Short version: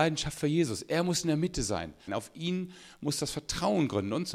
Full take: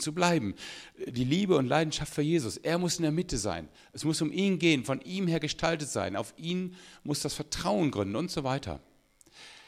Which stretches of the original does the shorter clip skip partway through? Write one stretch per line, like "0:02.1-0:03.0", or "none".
0:03.8-0:06.1